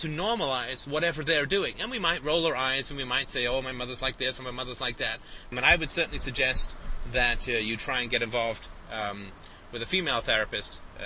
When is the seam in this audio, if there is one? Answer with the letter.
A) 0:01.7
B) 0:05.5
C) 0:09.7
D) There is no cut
B